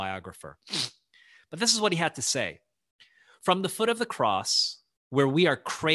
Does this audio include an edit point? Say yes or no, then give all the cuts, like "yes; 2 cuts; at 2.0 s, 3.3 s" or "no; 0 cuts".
no; 0 cuts